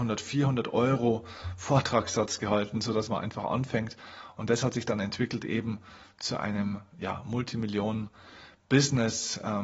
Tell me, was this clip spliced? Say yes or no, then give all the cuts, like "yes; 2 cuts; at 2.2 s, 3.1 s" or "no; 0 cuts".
no; 0 cuts